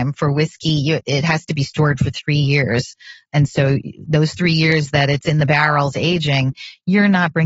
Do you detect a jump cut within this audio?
no; 0 cuts

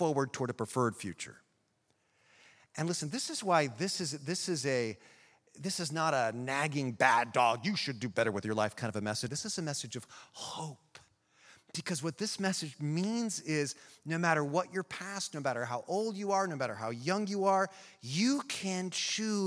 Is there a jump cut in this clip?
yes; 1 cut; at 9.3 s

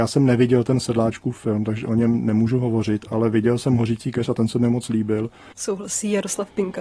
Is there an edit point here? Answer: yes; 1 cut; at 5.5 s

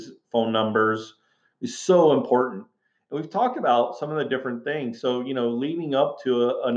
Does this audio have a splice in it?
no; 0 cuts

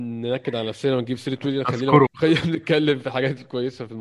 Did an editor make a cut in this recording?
yes; 1 cut; at 2.1 s

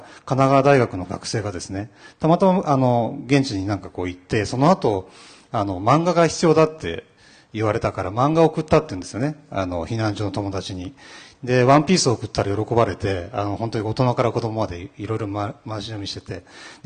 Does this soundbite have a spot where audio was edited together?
no; 0 cuts

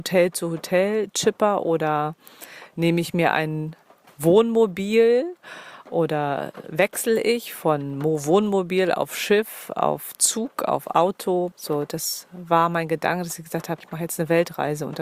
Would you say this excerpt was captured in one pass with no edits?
no; 2 cuts; at 11.5 s, 13.8 s

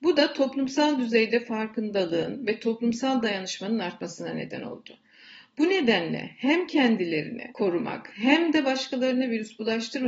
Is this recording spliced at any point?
no; 0 cuts

